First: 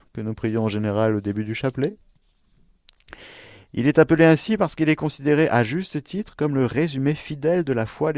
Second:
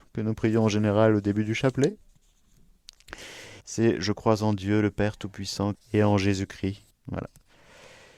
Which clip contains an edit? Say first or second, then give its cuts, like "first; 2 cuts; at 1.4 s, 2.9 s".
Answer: second; 3 cuts; at 3.6 s, 5.7 s, 6.9 s